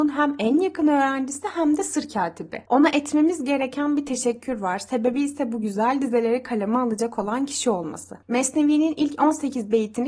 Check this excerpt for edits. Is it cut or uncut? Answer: uncut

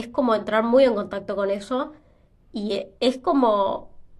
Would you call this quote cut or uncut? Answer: cut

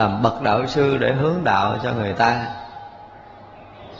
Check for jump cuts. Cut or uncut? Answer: uncut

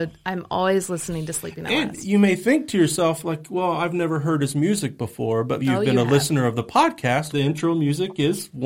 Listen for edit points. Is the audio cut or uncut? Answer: cut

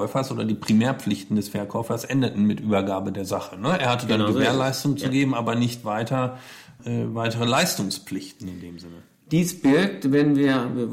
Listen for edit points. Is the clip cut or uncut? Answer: uncut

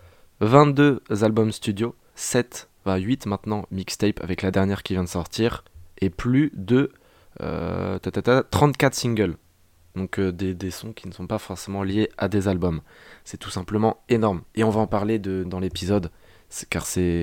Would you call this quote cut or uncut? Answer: cut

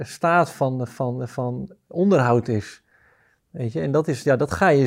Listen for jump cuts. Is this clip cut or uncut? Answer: uncut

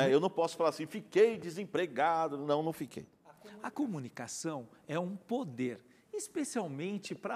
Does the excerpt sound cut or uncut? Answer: uncut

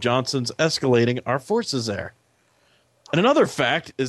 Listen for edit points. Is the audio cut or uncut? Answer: uncut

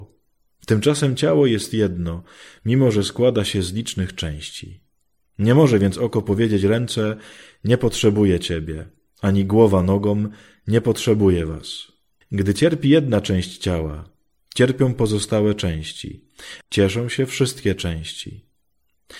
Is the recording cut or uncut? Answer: cut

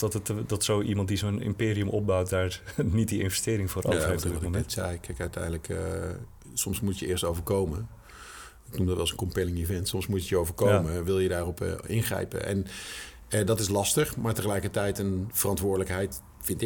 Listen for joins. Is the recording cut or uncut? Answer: uncut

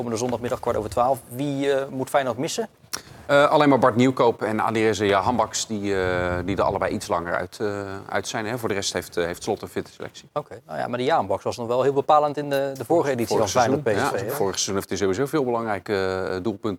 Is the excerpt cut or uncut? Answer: uncut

